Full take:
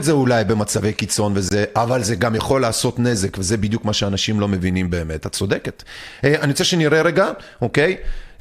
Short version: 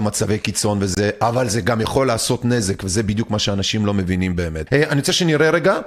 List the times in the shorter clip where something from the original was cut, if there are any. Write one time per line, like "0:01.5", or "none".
0:04.7